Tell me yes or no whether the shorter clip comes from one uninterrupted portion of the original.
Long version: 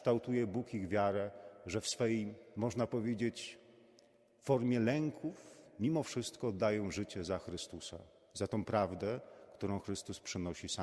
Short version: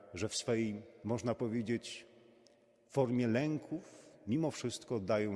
yes